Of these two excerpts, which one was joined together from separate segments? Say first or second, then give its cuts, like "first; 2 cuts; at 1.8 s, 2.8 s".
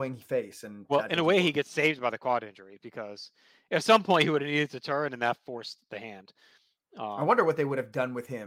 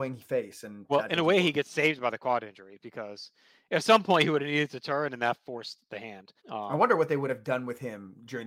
second; 1 cut; at 6.4 s